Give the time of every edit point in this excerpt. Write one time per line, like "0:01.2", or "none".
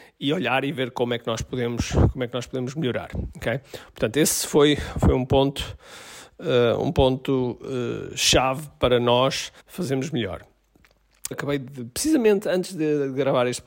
0:09.6
0:11.3